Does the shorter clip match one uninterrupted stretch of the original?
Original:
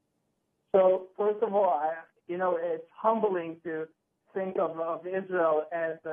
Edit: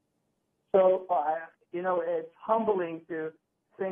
no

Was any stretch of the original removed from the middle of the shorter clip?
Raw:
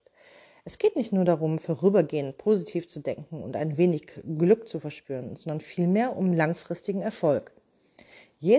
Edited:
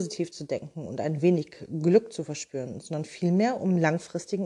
no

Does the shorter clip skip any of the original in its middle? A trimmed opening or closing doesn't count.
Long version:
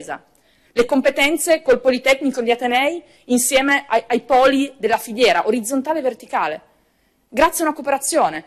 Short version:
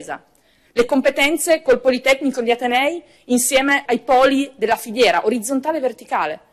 yes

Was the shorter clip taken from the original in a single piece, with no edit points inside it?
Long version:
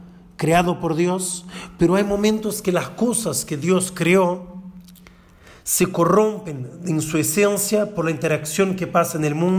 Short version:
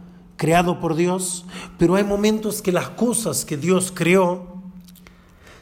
yes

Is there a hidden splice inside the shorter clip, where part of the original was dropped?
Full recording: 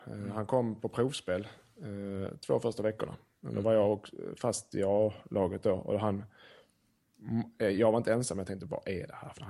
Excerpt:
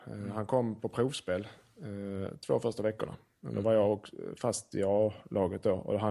no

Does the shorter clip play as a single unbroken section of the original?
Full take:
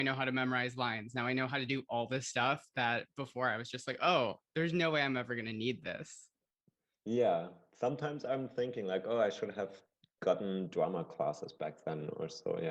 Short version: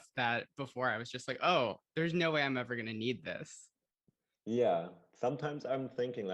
yes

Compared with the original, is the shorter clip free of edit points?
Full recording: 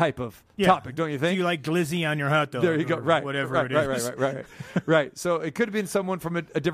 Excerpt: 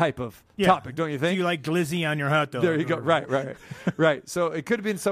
no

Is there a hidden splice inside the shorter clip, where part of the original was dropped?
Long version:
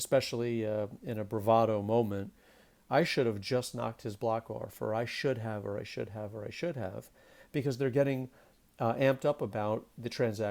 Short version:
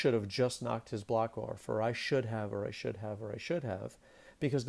no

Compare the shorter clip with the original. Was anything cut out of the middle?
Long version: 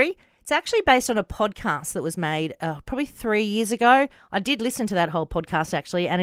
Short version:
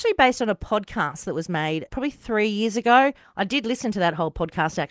yes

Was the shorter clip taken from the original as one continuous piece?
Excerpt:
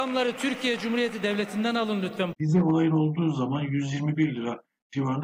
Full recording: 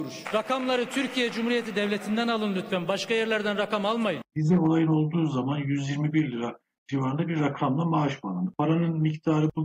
no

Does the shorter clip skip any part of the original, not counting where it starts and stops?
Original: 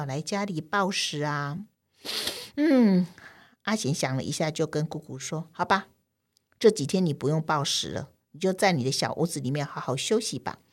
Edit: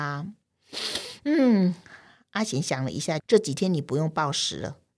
yes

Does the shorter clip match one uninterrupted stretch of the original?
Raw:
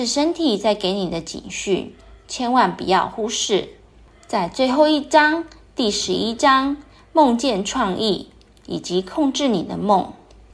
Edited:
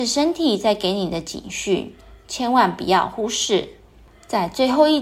yes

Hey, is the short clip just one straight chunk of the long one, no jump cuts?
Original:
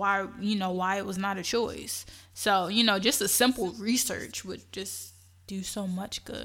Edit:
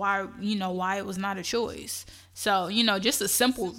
yes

